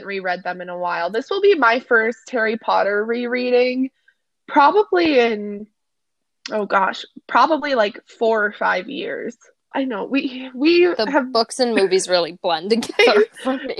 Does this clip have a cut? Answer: yes; 1 cut; at 9.7 s

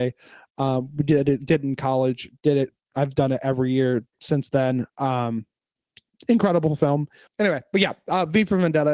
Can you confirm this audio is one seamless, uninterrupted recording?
no; 1 cut; at 7.3 s

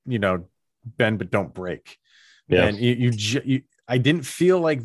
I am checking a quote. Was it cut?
no; 0 cuts

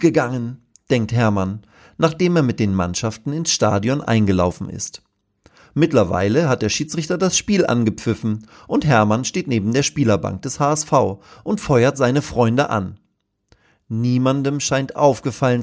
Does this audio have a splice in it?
no; 0 cuts

